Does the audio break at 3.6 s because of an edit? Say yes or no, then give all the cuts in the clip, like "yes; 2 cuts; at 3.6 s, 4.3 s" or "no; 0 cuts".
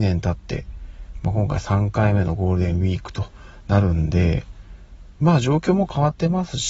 no; 0 cuts